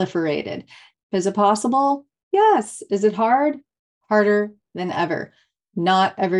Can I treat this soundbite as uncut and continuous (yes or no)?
no